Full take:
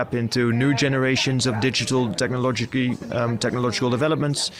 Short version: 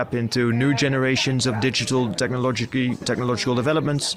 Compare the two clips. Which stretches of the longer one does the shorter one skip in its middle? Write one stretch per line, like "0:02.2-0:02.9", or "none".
0:03.0-0:03.4